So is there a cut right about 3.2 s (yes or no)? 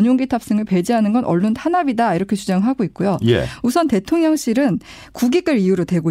yes